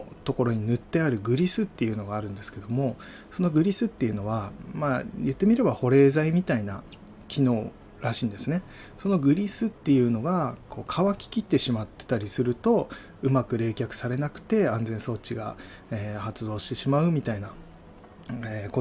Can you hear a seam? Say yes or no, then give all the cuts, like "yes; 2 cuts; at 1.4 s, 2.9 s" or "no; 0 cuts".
no; 0 cuts